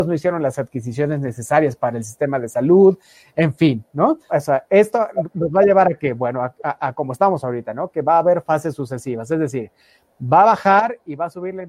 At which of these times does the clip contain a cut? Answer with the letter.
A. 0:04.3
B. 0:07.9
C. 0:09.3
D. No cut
A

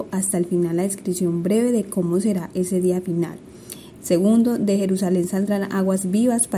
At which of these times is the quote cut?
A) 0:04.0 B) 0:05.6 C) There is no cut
A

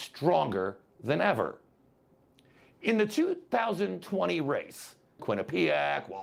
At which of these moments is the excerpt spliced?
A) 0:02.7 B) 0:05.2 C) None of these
B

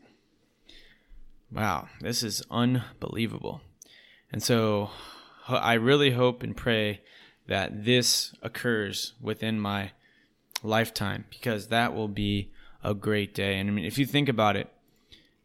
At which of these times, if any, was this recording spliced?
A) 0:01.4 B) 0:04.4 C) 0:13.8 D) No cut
D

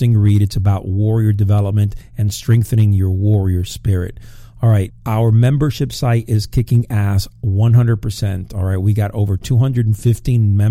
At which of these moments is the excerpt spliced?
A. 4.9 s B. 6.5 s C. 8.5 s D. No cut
A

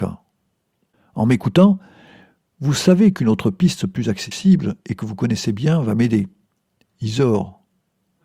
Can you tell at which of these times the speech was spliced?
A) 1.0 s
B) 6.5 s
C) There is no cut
C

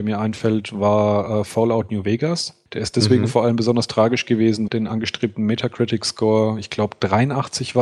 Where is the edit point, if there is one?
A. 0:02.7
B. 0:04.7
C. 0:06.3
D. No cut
B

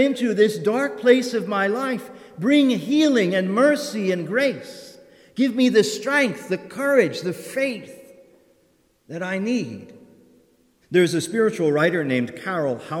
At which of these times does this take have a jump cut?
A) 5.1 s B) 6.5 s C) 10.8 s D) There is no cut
C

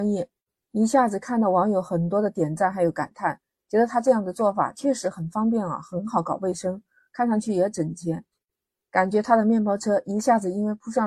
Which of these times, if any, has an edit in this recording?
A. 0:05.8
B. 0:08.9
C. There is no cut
C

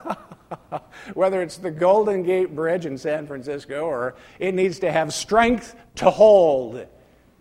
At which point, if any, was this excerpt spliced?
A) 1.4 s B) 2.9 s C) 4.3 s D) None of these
C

